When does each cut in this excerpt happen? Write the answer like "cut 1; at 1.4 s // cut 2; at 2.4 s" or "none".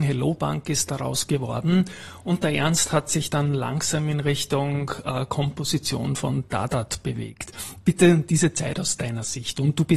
none